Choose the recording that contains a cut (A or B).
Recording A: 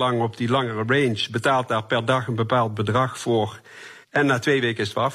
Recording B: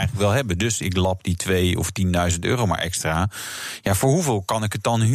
A